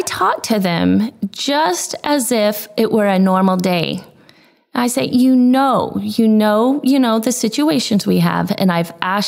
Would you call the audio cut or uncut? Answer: uncut